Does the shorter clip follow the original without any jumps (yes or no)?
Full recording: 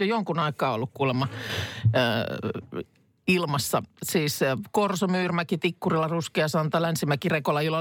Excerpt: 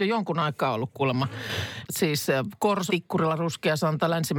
no